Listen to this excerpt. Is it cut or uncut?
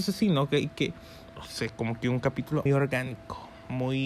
cut